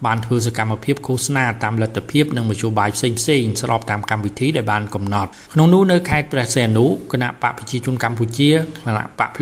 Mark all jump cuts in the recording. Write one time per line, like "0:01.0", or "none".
0:05.5